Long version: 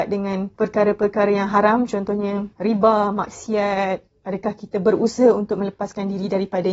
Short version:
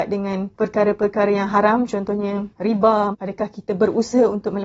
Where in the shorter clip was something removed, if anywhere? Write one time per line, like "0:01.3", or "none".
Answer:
0:03.1